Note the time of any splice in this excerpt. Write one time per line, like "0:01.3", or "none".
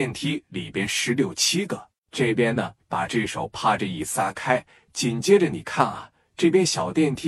0:02.0